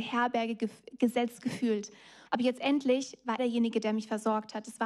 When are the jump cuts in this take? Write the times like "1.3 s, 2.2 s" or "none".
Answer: 2.3 s, 3.4 s